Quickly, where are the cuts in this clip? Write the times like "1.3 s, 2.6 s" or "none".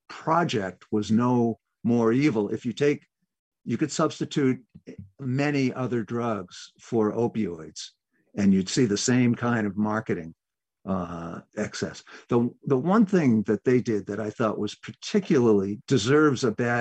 none